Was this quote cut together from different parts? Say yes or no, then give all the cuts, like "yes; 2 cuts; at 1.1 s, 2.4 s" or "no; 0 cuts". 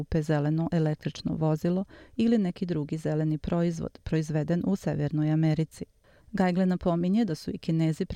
yes; 1 cut; at 6.2 s